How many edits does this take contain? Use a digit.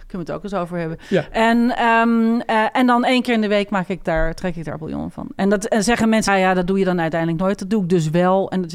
1